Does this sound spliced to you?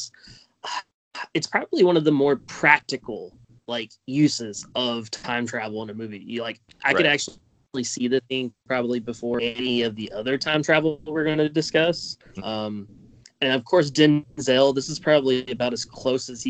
yes; 2 cuts; at 8.2 s, 12.4 s

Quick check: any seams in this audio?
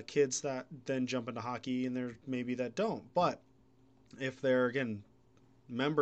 no; 0 cuts

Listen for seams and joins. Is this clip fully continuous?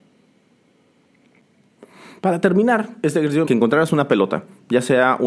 no; 1 cut; at 3.5 s

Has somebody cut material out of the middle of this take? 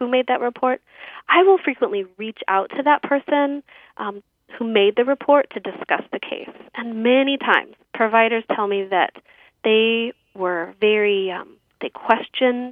yes; 1 cut; at 7.8 s

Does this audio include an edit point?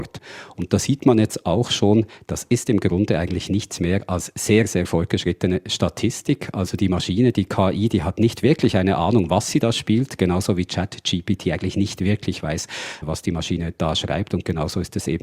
no; 0 cuts

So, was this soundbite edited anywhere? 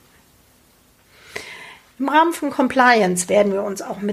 no; 0 cuts

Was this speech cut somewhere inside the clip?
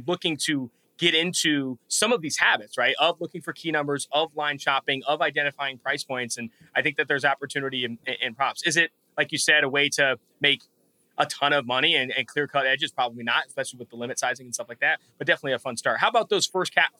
no; 0 cuts

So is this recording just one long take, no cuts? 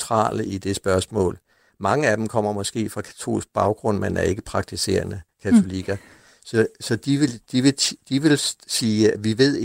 yes; 0 cuts

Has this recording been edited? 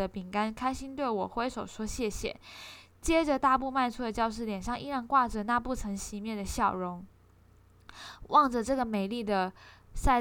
no; 0 cuts

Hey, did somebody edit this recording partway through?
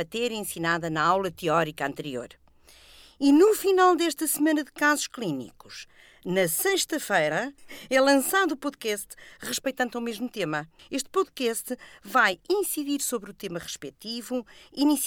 yes; 2 cuts; at 7.6 s, 10.8 s

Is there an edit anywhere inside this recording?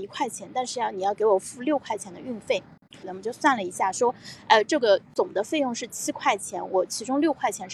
yes; 1 cut; at 3.0 s

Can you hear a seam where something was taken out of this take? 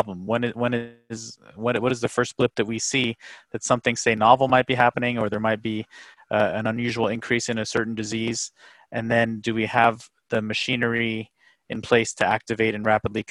no; 0 cuts

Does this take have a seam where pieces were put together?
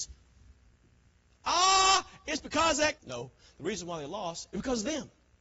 yes; 1 cut; at 3.0 s

